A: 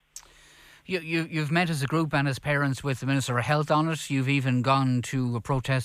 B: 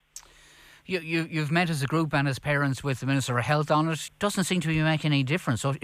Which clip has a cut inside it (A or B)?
B